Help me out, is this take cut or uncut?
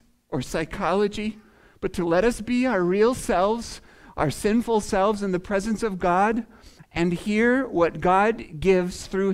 cut